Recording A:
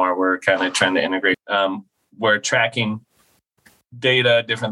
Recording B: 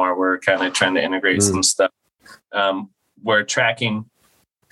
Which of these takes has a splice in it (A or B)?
A